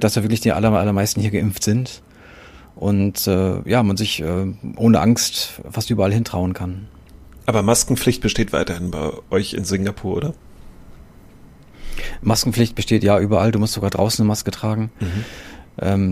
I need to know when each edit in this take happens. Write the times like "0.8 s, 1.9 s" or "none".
none